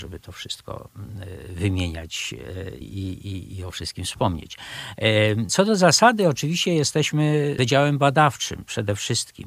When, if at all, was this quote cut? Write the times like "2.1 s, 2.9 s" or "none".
2.8 s, 5.5 s